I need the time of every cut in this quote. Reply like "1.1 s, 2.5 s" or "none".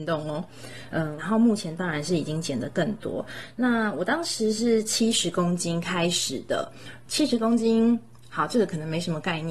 1.2 s

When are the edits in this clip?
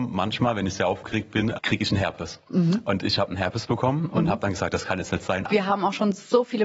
1.5 s, 5.5 s

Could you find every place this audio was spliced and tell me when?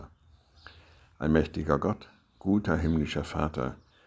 none

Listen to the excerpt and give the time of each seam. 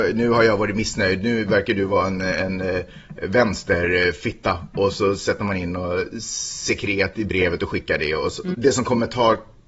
8.5 s

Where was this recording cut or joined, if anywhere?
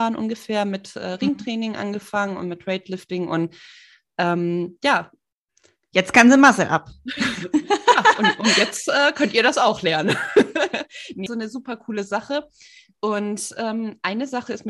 11.3 s

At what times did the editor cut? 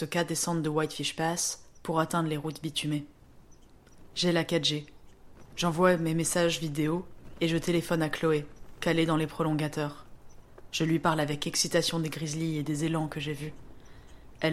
none

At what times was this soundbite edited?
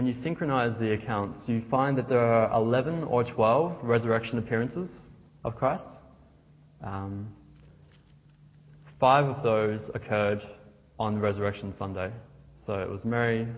none

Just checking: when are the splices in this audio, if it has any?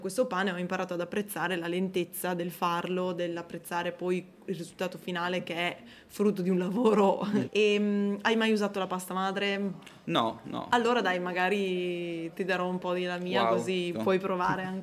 7.4 s, 13.9 s

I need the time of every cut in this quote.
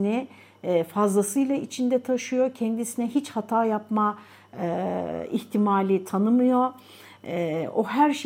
none

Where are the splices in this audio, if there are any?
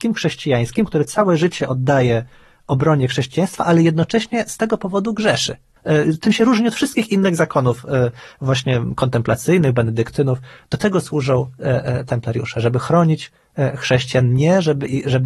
5.8 s

